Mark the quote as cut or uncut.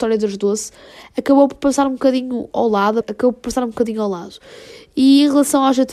cut